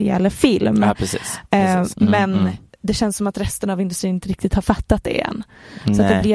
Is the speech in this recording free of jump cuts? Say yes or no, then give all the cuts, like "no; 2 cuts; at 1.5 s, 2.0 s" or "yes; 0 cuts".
no; 1 cut; at 1.9 s